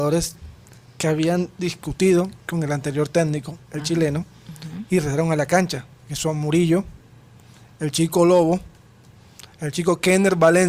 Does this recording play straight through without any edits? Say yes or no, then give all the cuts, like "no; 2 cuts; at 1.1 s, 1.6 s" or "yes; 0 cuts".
yes; 0 cuts